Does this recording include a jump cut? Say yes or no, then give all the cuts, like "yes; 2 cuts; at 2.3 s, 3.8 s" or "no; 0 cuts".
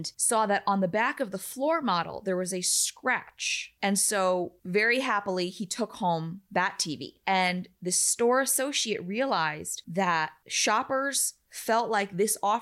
no; 0 cuts